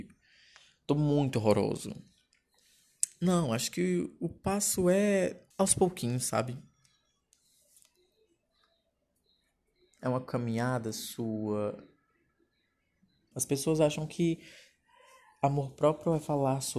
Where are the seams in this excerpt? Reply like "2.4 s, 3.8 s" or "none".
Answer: 5.5 s, 10.0 s, 13.3 s